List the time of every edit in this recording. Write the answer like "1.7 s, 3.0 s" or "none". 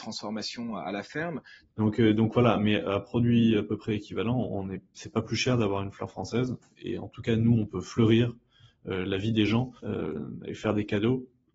1.7 s, 9.8 s

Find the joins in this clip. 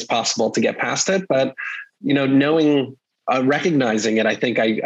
none

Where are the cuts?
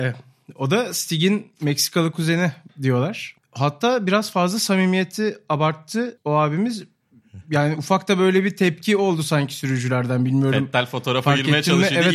3.4 s

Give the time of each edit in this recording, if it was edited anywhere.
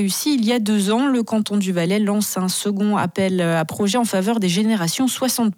none

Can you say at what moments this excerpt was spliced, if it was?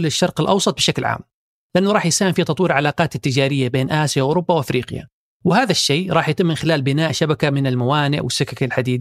none

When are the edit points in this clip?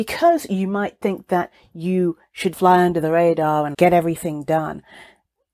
2.5 s, 3.7 s

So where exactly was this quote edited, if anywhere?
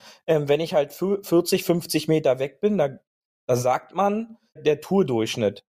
4.6 s

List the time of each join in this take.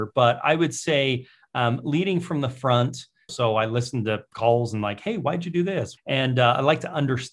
3.3 s, 6.0 s

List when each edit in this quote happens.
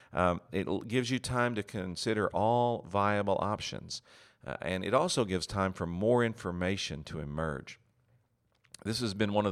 none

